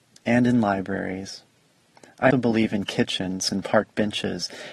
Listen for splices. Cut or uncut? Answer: cut